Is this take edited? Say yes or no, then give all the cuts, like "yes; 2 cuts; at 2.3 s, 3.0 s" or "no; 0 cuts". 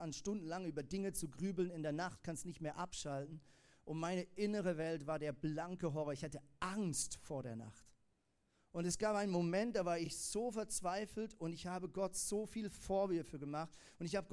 no; 0 cuts